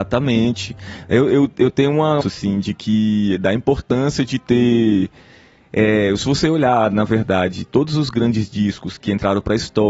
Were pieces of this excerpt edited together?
yes; 2 cuts; at 2.2 s, 9.0 s

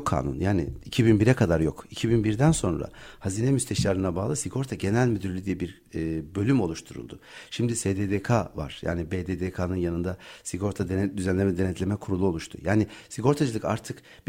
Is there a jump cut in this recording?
no; 0 cuts

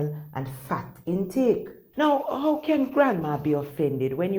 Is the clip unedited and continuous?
no; 1 cut; at 1.9 s

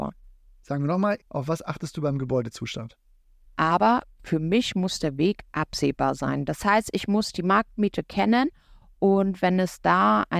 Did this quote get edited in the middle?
yes; 2 cuts; at 1.2 s, 3.4 s

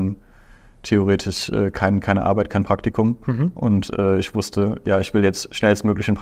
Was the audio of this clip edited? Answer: no; 0 cuts

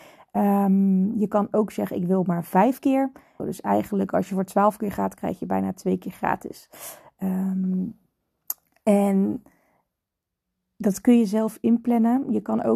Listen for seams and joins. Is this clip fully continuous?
no; 1 cut; at 3.4 s

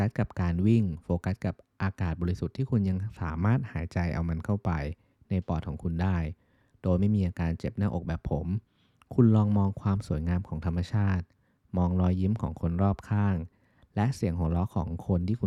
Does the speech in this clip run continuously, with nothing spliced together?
yes; 0 cuts

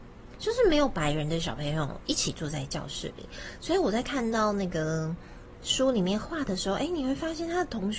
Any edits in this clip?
no; 0 cuts

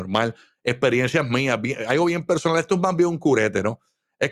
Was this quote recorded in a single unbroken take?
yes; 0 cuts

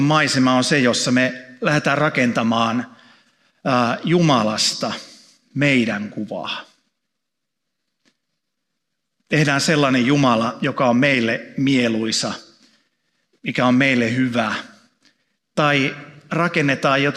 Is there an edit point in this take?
no; 0 cuts

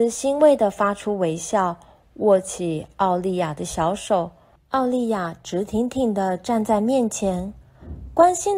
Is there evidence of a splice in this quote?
yes; 1 cut; at 4.6 s

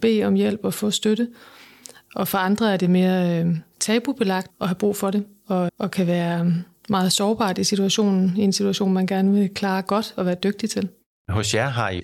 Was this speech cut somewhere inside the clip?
yes; 2 cuts; at 4.5 s, 5.7 s

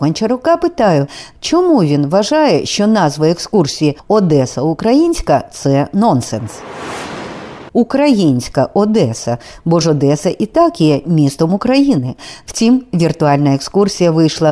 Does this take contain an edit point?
yes; 1 cut; at 7.7 s

